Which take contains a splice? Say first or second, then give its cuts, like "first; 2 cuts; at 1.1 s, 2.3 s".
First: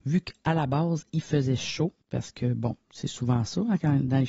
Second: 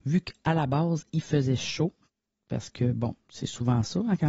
first; 1 cut; at 2.0 s